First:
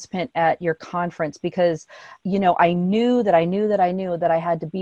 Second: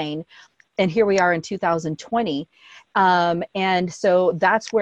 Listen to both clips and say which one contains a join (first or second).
first